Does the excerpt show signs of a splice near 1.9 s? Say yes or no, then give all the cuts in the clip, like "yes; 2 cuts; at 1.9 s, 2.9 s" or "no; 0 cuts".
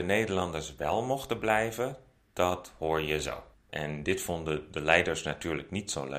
no; 1 cut; at 3.7 s